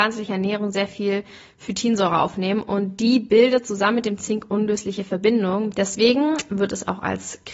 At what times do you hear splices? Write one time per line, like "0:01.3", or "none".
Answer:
0:05.7

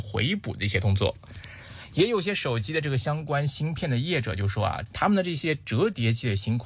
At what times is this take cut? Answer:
0:04.9

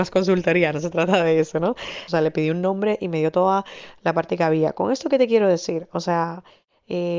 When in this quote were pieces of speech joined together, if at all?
0:02.1

